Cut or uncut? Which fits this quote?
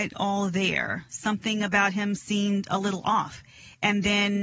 uncut